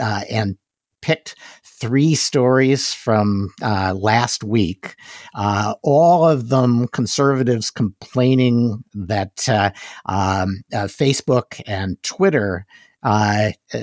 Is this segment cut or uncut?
uncut